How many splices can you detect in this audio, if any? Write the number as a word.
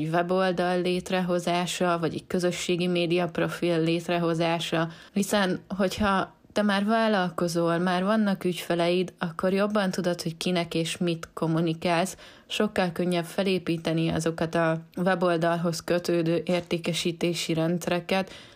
one